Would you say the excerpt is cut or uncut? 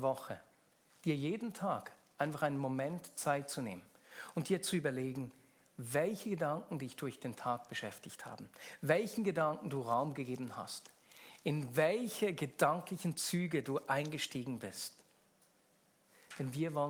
uncut